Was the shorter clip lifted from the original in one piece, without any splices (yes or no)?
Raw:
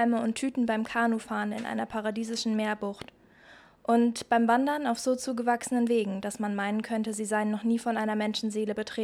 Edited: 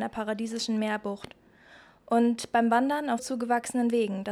no